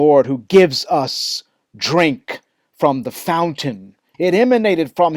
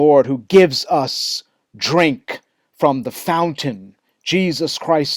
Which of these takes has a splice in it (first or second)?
first